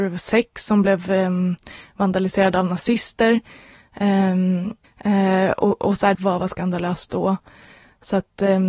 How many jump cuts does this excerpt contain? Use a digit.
2